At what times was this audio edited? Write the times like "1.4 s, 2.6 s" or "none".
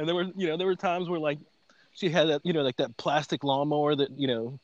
none